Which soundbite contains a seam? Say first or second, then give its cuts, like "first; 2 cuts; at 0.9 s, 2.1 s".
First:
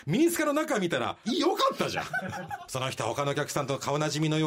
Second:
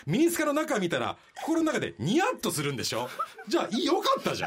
first; 2 cuts; at 1.2 s, 2.7 s